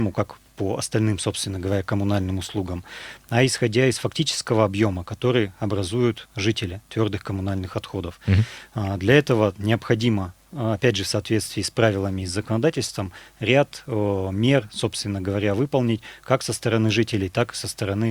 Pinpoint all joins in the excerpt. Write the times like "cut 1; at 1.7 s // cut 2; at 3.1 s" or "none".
none